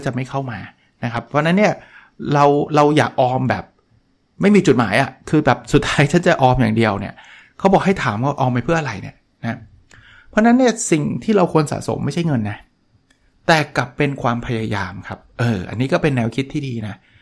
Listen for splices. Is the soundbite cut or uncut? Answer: uncut